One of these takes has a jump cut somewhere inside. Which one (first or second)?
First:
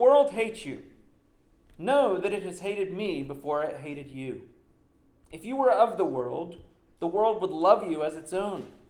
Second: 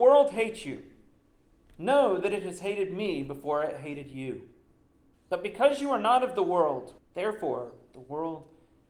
second